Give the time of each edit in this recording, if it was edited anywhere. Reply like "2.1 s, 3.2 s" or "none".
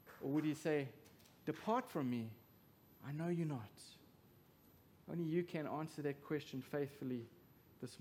none